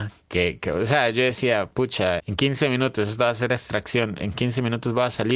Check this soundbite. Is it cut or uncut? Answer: cut